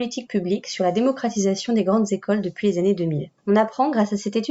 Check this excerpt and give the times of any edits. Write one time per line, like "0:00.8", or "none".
0:03.4